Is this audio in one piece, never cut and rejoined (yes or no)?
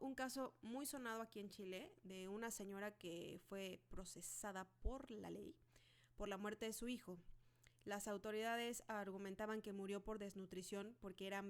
yes